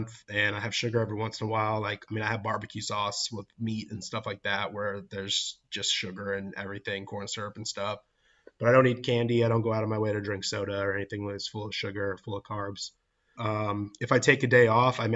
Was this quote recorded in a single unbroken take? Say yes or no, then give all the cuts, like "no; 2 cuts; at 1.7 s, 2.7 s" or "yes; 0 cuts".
no; 1 cut; at 13.4 s